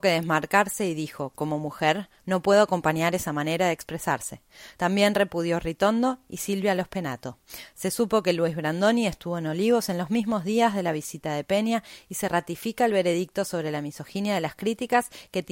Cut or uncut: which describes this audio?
uncut